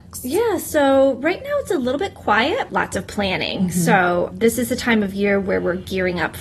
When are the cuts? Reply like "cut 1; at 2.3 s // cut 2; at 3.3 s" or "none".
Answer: cut 1; at 2.7 s // cut 2; at 4.3 s